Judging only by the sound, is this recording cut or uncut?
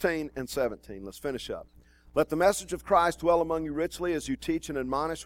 uncut